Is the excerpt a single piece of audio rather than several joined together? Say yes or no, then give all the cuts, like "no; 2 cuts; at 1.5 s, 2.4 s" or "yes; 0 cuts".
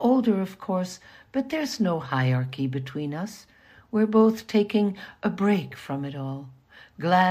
yes; 0 cuts